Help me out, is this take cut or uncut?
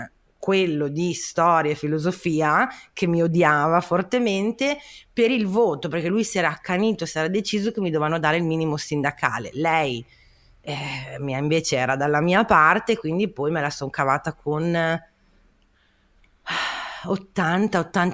uncut